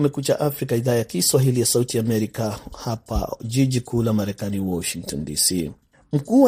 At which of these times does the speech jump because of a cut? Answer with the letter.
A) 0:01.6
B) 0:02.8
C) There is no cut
C